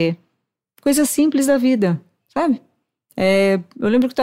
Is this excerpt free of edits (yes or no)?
yes